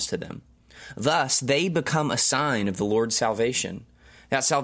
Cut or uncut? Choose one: uncut